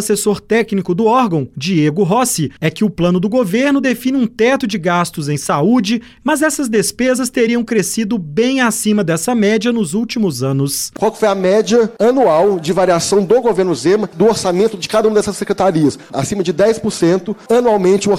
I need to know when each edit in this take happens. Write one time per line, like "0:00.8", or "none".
0:06.2